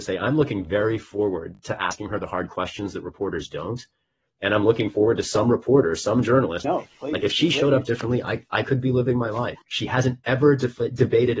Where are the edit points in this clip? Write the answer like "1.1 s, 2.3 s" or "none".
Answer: 6.6 s, 9.6 s

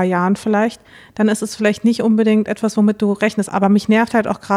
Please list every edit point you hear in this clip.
3.5 s

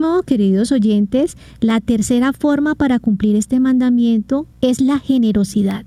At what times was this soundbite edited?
4.5 s

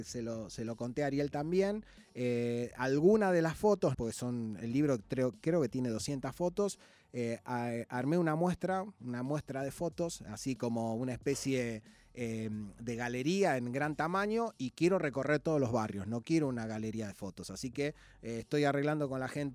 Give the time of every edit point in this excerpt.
3.9 s

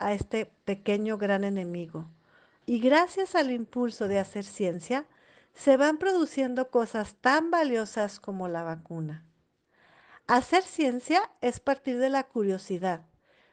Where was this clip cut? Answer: 2.6 s

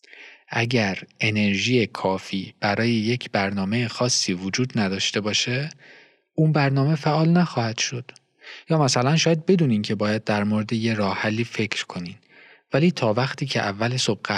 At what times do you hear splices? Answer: 8.6 s

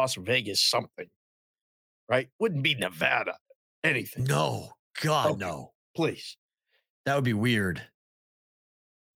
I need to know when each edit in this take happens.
none

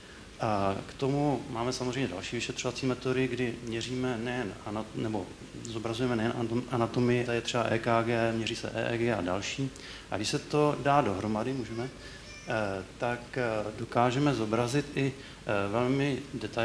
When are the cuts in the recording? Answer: 7.3 s

